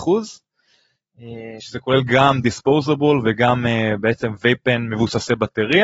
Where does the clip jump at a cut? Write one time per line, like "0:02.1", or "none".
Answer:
none